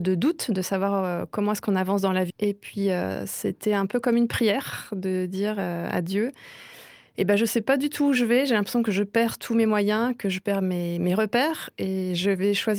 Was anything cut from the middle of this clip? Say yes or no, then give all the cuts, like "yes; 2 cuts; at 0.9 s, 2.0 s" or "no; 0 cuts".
yes; 1 cut; at 2.3 s